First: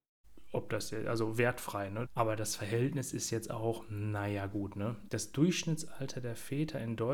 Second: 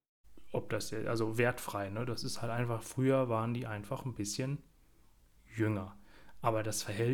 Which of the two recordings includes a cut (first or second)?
first